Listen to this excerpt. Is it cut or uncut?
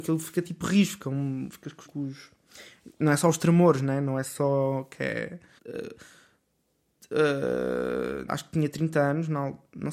cut